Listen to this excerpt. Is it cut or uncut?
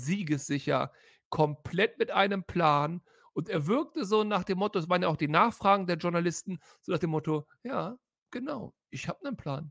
uncut